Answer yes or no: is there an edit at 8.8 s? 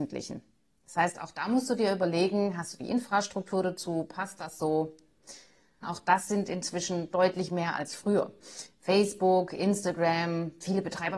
no